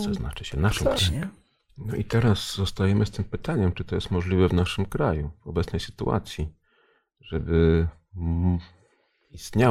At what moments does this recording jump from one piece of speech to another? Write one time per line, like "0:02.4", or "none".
0:01.0